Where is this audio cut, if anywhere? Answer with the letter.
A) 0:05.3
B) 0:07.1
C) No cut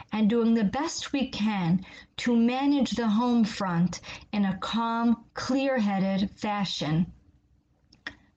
A